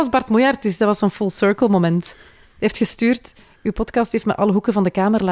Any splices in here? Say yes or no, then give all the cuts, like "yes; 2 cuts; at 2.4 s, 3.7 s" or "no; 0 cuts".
no; 0 cuts